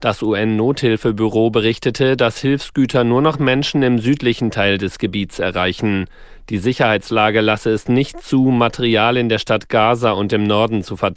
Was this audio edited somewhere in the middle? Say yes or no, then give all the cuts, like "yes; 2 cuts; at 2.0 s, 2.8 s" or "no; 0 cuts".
no; 0 cuts